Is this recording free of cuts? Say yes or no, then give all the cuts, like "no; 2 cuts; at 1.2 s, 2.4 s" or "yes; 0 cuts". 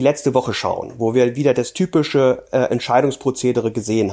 yes; 0 cuts